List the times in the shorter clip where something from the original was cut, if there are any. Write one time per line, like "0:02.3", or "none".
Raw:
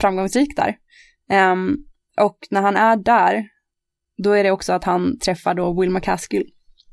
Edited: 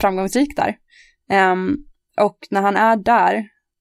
none